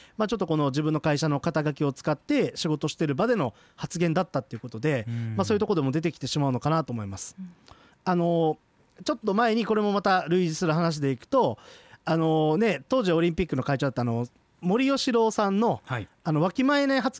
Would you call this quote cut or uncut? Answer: uncut